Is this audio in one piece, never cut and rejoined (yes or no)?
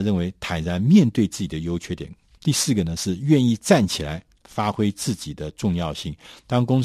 no